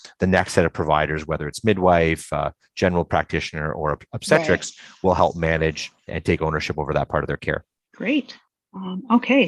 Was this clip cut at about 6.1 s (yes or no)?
yes